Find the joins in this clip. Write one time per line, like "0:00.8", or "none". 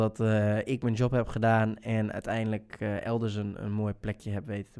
none